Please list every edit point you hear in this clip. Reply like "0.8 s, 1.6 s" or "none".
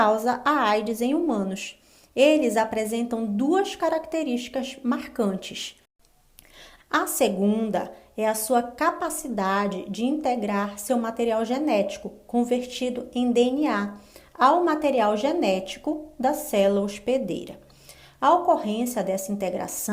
6.8 s